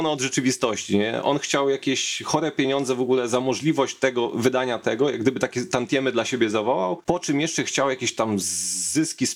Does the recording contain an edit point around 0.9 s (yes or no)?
no